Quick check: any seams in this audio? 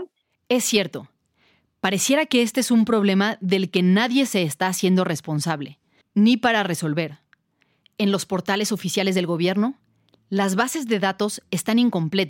yes; 1 cut; at 6.0 s

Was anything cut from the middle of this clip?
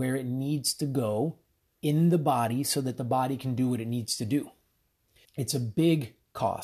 yes; 1 cut; at 5.2 s

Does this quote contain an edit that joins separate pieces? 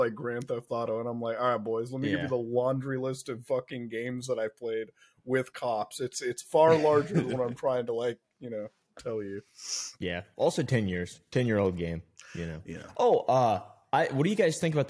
no; 0 cuts

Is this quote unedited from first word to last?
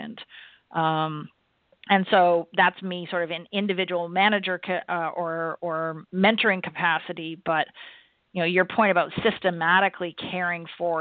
yes; 0 cuts

